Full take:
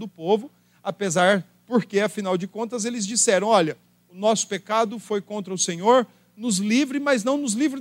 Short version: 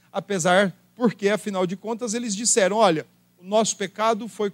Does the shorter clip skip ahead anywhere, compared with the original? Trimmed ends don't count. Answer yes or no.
no